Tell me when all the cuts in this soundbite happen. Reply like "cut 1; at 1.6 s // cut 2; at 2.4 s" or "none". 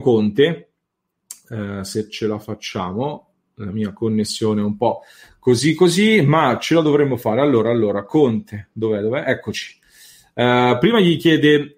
none

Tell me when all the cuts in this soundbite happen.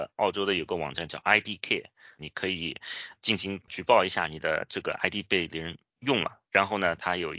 cut 1; at 2.2 s

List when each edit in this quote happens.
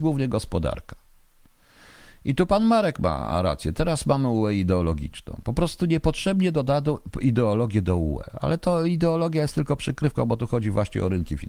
none

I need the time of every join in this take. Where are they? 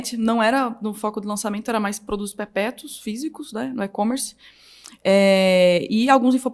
none

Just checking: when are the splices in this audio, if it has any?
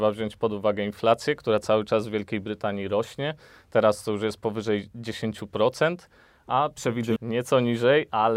cut 1; at 7.2 s

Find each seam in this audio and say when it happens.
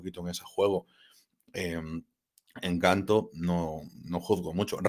none

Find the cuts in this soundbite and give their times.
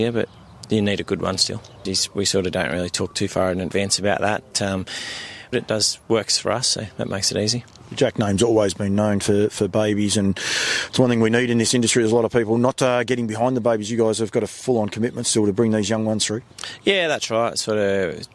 cut 1; at 1.9 s // cut 2; at 5.5 s

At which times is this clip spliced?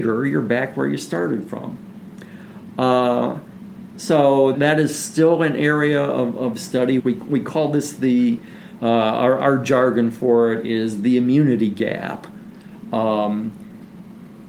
cut 1; at 4.5 s // cut 2; at 7.0 s

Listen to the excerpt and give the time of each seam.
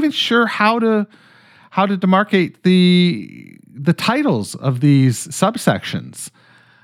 none

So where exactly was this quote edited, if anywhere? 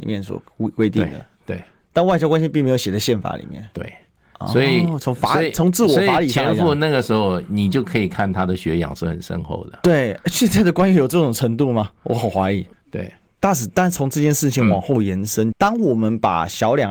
cut 1; at 12.7 s // cut 2; at 15.5 s

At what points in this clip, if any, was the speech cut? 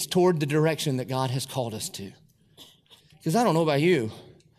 cut 1; at 3.0 s

